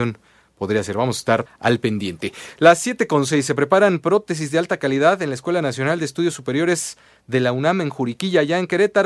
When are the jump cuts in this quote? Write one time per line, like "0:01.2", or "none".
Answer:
0:01.5

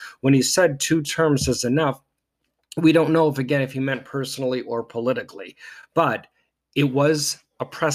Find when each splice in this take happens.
none

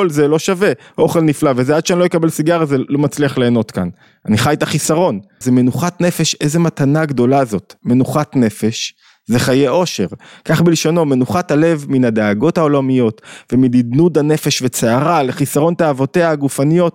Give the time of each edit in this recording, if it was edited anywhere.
0:05.4

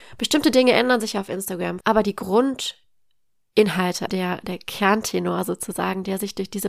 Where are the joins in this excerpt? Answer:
0:01.8
0:04.1

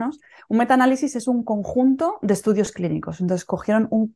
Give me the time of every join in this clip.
none

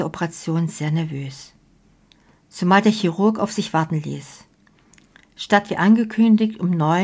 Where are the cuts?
none

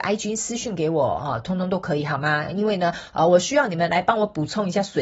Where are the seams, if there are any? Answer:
none

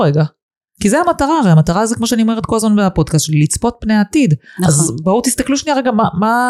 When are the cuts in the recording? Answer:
none

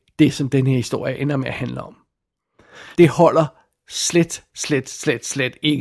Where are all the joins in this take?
0:02.9
0:04.5

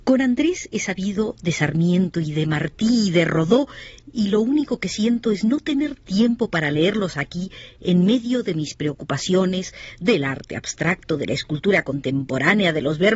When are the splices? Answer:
none

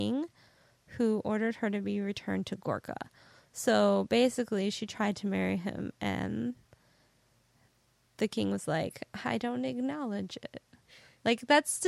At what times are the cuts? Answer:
none

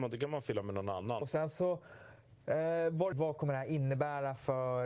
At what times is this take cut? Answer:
0:01.2
0:03.1

